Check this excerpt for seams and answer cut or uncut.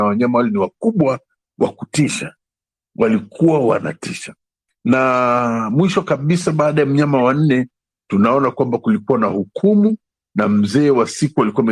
uncut